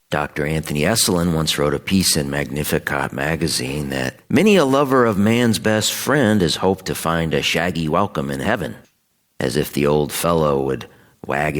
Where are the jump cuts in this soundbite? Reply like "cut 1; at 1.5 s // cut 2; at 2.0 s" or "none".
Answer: cut 1; at 4.2 s